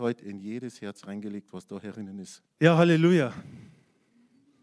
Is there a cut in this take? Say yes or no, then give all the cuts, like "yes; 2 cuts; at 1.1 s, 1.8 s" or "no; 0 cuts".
yes; 1 cut; at 2.5 s